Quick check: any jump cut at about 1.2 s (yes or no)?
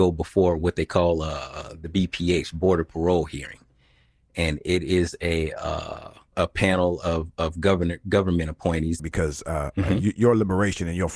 no